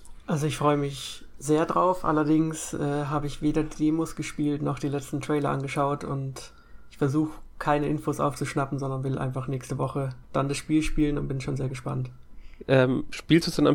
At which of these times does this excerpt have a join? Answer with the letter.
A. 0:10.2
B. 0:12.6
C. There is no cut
A